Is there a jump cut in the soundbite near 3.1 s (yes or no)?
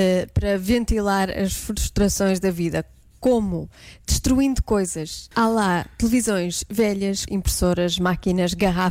no